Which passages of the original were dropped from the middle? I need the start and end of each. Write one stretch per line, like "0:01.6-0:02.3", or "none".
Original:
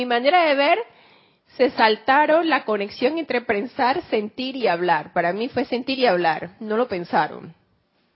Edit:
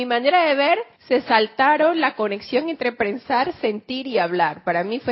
0:00.9-0:01.4